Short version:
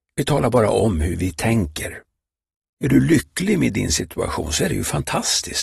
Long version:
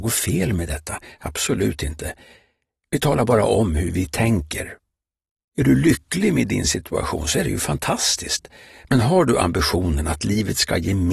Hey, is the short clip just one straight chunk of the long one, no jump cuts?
yes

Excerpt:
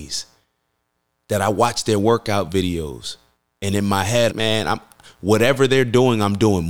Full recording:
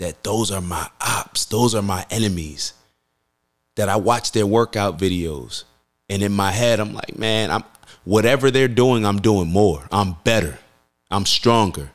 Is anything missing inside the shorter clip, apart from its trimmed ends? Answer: yes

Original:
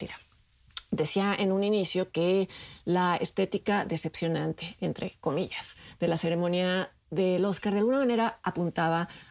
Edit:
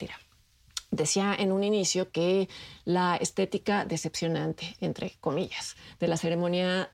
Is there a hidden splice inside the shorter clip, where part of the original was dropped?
no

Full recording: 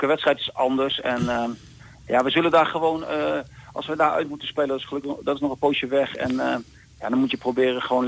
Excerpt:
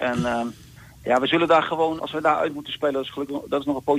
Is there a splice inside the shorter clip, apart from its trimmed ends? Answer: yes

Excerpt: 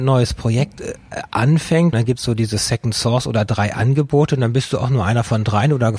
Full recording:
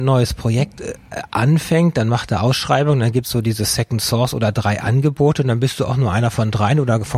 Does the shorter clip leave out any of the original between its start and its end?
yes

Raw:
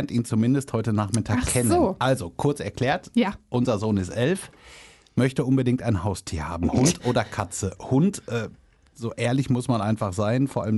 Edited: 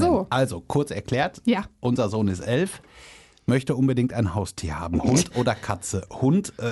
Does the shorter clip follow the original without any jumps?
yes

